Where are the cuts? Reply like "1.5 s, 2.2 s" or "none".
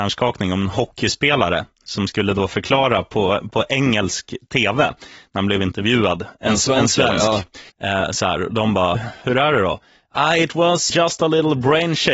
7.7 s, 8.9 s, 10.9 s